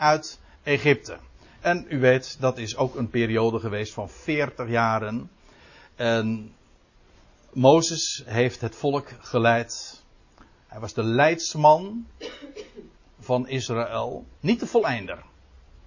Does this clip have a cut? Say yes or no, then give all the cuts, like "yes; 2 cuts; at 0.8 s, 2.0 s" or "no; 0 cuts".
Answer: no; 0 cuts